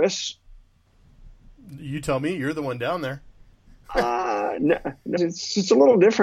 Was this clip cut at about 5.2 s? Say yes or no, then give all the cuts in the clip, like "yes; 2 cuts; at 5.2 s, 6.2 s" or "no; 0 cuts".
yes; 1 cut; at 5.2 s